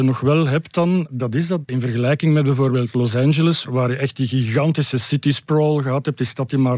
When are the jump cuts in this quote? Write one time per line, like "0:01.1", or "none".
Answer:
0:01.7